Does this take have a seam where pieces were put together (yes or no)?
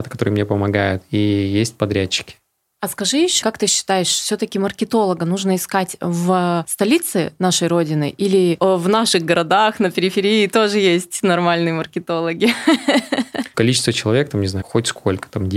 yes